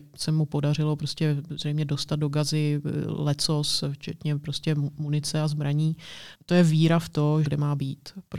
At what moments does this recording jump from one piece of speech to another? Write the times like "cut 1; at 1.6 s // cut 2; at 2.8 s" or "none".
cut 1; at 6.3 s // cut 2; at 7.4 s